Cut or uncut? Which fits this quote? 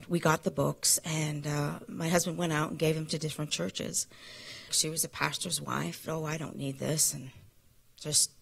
cut